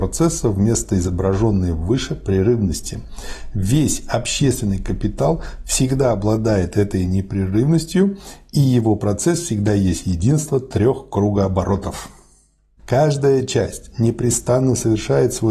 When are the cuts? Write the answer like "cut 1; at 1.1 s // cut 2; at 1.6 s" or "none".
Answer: cut 1; at 12.8 s